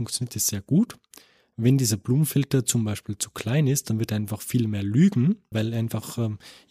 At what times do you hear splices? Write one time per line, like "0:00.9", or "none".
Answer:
0:05.5